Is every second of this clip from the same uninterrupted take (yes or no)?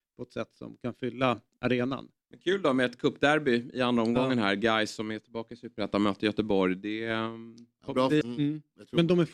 no